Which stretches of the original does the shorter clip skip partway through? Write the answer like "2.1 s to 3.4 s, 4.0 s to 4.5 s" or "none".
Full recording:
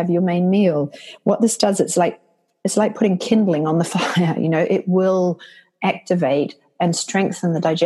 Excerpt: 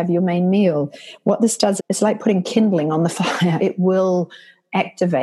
1.8 s to 2.5 s, 4.3 s to 4.7 s